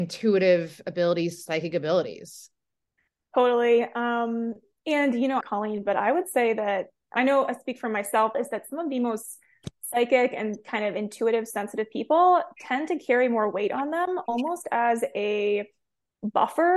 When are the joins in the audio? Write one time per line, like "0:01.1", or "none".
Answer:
0:05.4
0:08.3